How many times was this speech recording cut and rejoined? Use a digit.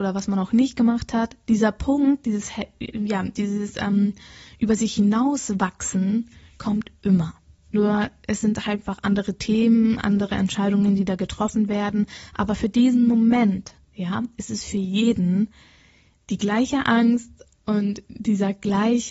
1